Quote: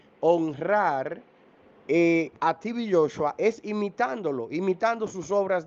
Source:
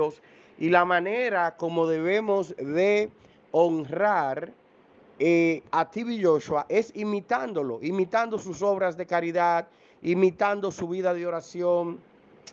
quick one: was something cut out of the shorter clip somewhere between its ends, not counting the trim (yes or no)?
no